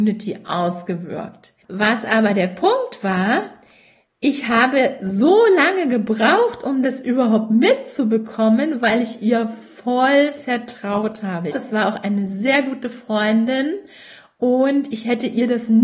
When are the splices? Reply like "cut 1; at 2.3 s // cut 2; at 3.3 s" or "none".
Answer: cut 1; at 11.5 s